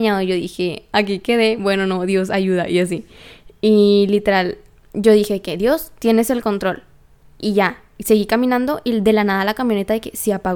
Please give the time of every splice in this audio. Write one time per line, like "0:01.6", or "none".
none